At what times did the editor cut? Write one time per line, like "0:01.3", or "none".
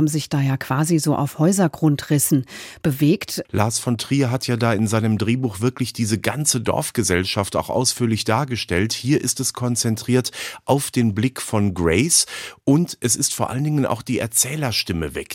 0:03.5